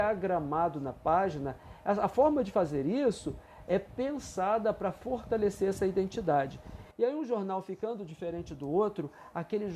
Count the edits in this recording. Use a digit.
1